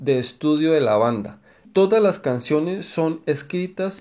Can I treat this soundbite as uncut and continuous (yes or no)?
no